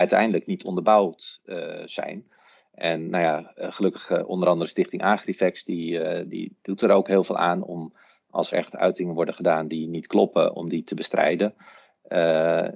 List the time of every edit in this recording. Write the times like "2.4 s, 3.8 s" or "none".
8.5 s